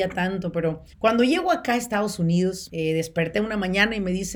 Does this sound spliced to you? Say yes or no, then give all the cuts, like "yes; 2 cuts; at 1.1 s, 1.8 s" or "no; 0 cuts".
yes; 2 cuts; at 0.9 s, 2.7 s